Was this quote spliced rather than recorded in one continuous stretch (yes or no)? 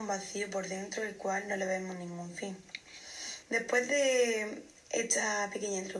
yes